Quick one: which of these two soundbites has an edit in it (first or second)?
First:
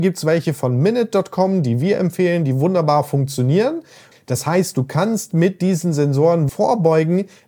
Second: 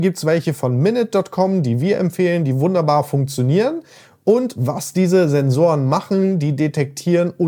first